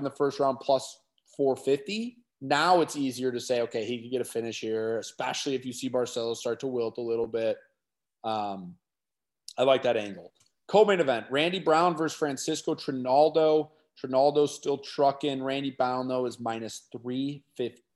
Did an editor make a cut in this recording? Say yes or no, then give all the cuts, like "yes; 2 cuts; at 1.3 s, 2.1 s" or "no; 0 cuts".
no; 0 cuts